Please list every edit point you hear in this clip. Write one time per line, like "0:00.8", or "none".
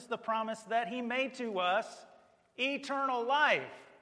none